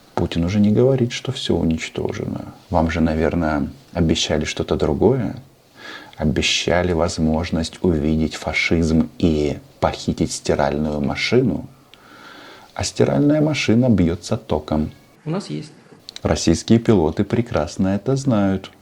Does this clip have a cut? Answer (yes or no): yes